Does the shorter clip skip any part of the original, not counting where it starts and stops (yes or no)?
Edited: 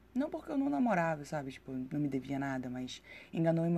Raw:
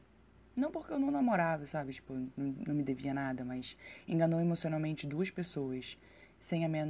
yes